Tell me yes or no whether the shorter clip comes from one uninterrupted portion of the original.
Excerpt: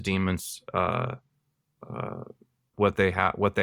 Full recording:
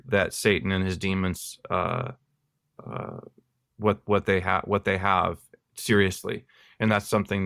no